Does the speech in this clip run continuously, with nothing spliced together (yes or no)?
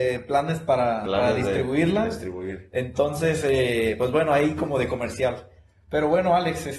yes